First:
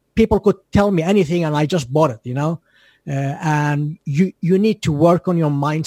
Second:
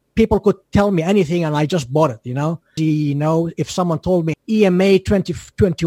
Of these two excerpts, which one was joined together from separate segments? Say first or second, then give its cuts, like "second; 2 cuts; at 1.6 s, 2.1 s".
second; 2 cuts; at 2.8 s, 4.3 s